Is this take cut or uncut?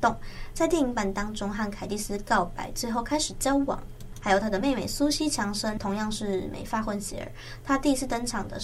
uncut